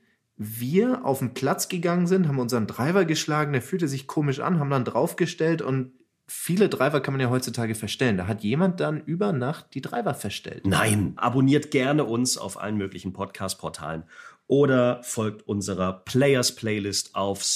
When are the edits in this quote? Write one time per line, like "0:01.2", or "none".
0:11.2